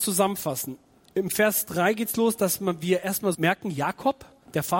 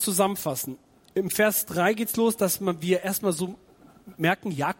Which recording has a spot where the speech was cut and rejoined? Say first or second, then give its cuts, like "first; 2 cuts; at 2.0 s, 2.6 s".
first; 1 cut; at 3.3 s